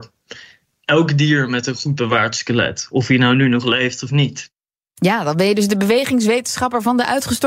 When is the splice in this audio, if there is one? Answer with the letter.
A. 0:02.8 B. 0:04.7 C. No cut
C